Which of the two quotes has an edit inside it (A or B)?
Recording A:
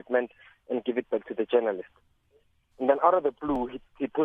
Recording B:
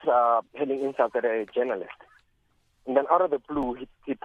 A